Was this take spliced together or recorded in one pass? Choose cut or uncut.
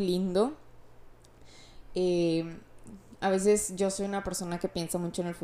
uncut